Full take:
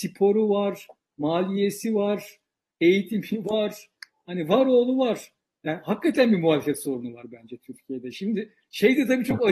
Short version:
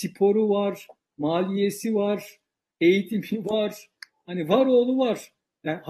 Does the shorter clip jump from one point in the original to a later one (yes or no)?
no